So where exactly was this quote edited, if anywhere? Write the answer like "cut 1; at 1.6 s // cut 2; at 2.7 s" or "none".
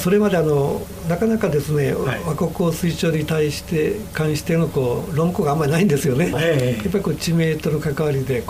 cut 1; at 6.3 s